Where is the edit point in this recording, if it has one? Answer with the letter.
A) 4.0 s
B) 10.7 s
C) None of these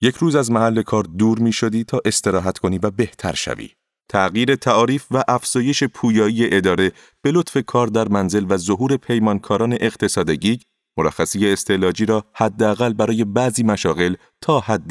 A